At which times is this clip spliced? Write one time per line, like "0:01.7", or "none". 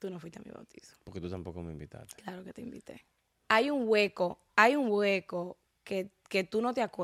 0:03.5